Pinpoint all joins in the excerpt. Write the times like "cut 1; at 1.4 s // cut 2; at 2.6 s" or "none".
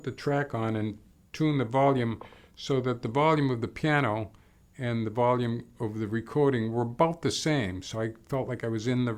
none